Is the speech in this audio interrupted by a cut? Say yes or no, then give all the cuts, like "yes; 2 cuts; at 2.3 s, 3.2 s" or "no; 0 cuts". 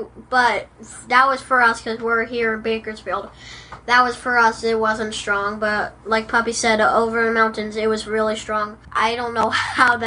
yes; 1 cut; at 8.8 s